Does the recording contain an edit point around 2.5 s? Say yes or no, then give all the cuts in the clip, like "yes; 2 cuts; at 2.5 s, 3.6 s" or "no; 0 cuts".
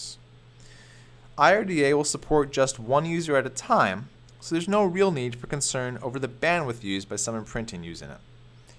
no; 0 cuts